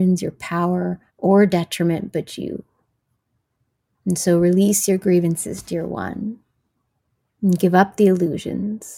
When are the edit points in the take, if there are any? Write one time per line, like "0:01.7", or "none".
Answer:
0:01.1